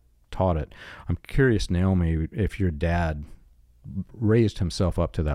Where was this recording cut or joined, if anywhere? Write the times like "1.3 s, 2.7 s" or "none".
none